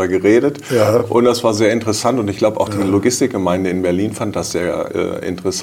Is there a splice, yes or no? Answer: no